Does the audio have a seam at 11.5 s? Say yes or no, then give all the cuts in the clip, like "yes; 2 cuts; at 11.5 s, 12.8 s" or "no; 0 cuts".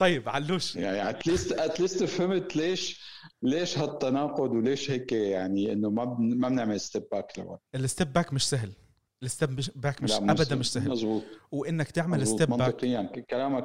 no; 1 cut; at 7.7 s